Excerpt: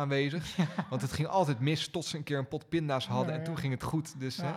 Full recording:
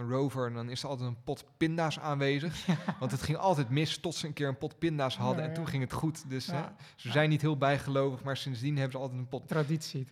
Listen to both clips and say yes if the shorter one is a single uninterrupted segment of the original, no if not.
yes